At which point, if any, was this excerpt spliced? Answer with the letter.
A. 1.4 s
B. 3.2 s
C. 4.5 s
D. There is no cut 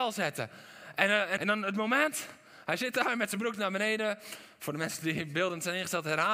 A